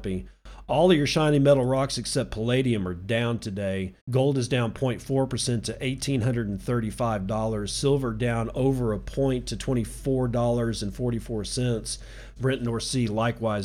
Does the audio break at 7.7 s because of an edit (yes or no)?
no